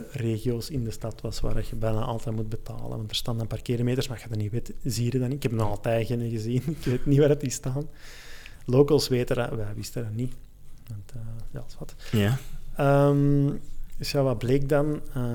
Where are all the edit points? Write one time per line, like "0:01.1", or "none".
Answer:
none